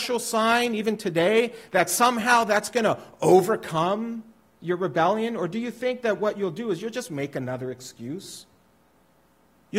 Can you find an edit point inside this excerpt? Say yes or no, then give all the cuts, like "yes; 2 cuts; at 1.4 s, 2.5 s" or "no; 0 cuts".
no; 0 cuts